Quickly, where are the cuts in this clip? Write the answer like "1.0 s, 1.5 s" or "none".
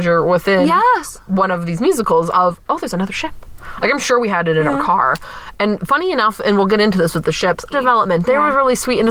3.8 s, 7.7 s